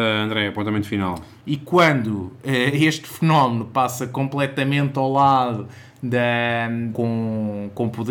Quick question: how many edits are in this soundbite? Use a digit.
2